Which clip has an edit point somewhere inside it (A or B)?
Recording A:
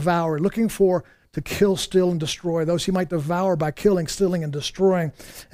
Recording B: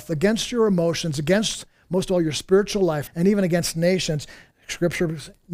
B